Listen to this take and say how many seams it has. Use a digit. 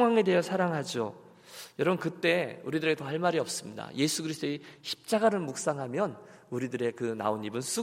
0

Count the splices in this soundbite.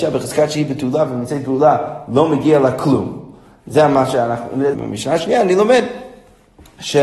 1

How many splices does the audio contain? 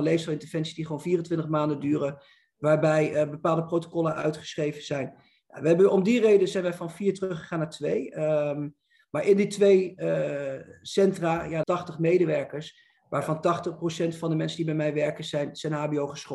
1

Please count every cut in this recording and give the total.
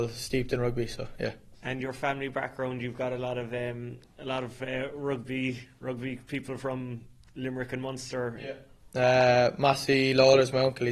1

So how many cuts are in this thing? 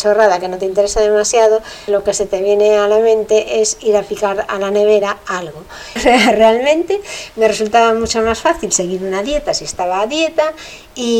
2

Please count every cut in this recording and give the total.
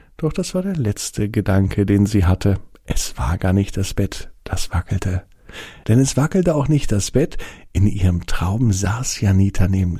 1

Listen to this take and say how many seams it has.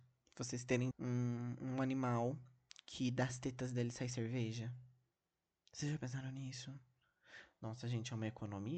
1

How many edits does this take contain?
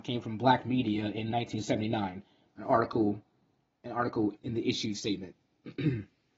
2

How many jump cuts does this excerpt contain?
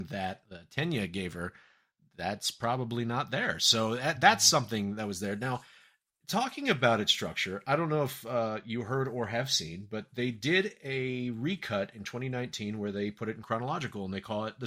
0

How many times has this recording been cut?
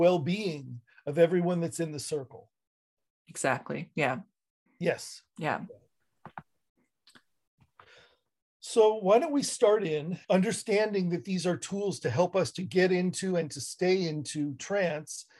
1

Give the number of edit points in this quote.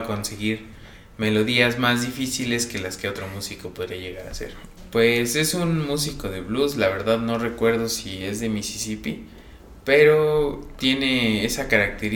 1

